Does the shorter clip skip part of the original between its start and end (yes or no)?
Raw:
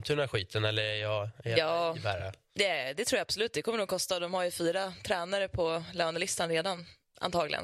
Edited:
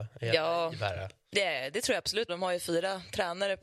yes